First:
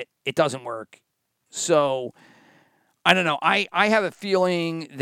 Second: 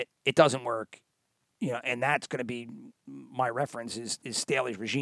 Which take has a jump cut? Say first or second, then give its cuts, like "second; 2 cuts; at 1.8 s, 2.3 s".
first; 1 cut; at 1.5 s